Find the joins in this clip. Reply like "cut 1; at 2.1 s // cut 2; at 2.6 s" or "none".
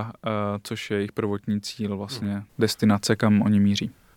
cut 1; at 2.5 s